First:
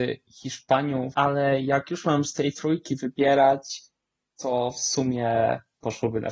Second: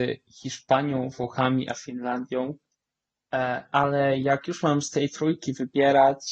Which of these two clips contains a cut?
first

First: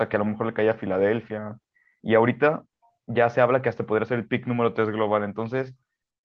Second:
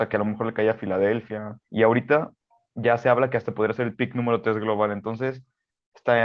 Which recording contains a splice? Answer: second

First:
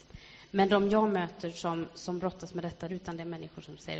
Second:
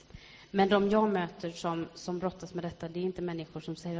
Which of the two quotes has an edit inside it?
first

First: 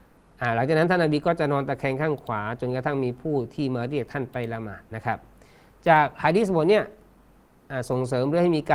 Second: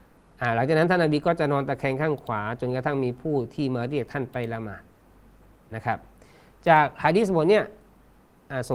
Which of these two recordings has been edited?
first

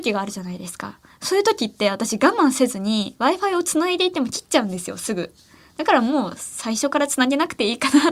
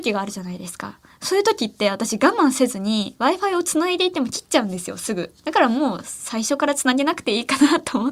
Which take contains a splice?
second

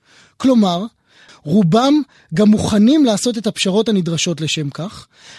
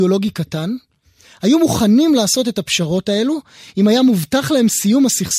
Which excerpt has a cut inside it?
first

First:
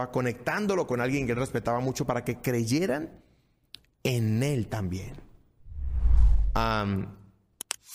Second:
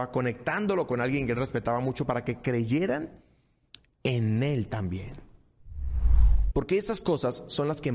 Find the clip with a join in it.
second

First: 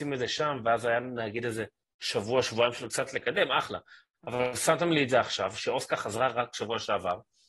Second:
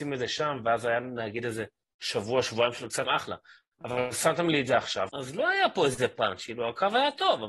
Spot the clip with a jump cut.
second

